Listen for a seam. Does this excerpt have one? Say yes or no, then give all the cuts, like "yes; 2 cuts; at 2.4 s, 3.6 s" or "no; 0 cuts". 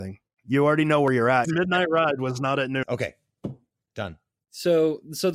yes; 2 cuts; at 1.4 s, 2.8 s